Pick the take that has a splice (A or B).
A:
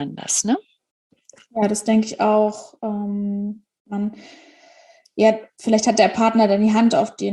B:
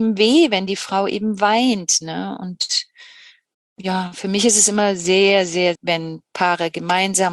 B